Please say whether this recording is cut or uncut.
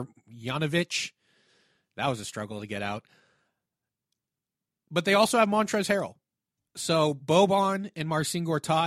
uncut